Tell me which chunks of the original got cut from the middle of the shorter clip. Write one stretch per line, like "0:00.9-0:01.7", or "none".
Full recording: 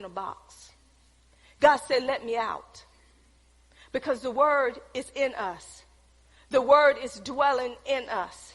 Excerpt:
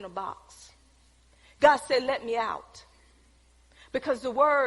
none

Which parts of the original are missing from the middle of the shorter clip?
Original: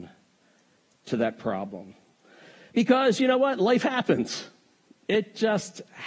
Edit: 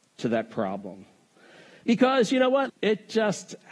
0:03.6-0:05.0

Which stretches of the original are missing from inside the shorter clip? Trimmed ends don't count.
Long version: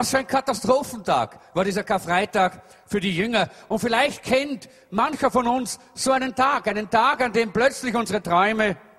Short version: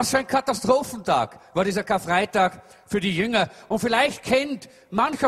none

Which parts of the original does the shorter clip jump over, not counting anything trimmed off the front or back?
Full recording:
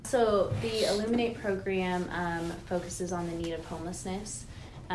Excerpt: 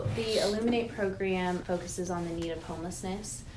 0:02.1-0:02.6

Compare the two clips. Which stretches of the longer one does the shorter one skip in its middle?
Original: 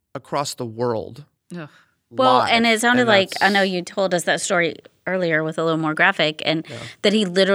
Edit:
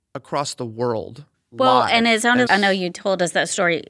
0:01.3-0:01.9
0:03.1-0:03.4

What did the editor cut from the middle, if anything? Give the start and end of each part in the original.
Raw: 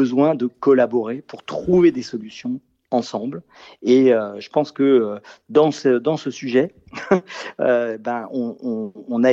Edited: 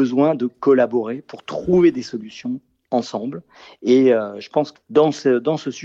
0:04.8-0:05.4

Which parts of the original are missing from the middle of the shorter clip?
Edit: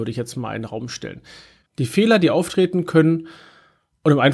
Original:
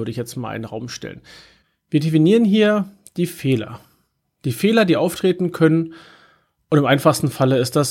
0:01.7-0:04.3

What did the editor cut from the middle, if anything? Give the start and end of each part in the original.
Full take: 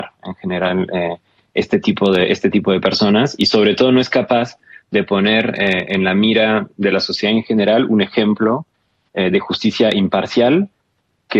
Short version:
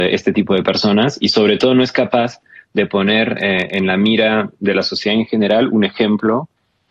none

